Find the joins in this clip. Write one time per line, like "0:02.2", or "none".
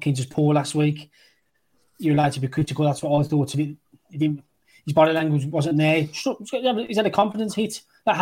none